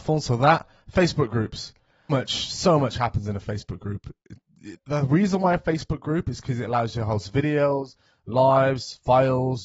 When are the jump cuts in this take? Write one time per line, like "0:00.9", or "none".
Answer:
0:02.1
0:04.8